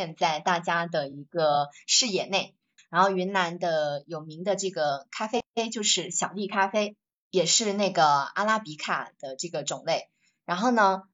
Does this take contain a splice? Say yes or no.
yes